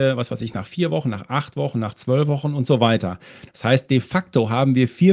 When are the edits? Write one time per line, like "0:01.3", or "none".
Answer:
none